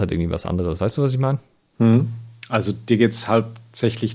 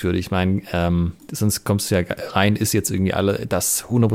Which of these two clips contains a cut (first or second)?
second